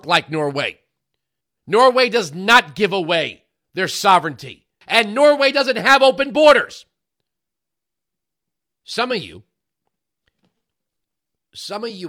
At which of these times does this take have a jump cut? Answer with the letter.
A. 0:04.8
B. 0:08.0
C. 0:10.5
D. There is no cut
A